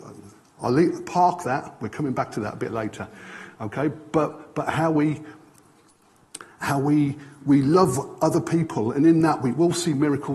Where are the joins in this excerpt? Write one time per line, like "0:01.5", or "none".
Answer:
0:07.4

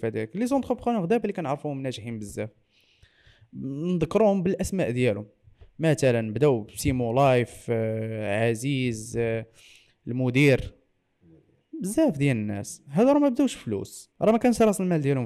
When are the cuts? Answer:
0:14.1

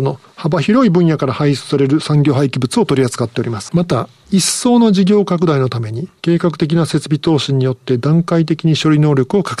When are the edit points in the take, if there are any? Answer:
0:03.7

